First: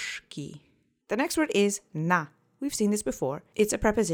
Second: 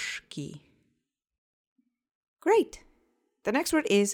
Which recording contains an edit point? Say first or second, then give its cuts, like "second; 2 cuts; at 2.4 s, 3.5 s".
first; 1 cut; at 1.0 s